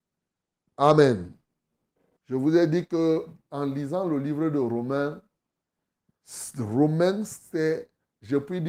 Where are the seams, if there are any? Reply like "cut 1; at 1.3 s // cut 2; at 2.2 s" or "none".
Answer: cut 1; at 2.2 s